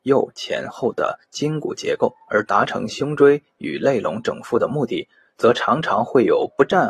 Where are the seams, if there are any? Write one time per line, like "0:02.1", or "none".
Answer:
none